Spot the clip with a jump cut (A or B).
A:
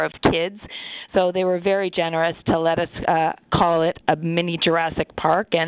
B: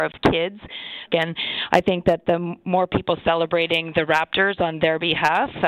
B